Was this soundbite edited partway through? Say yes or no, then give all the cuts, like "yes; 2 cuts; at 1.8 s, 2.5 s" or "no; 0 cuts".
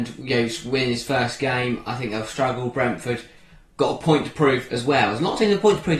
no; 0 cuts